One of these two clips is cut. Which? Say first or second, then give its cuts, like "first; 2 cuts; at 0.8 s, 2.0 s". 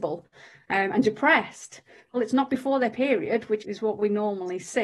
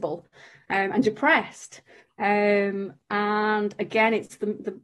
first; 2 cuts; at 2.1 s, 3.6 s